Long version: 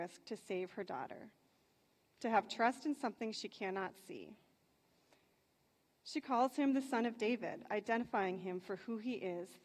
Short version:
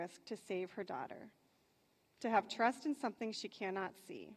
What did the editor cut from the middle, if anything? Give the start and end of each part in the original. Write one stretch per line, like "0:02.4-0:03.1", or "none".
none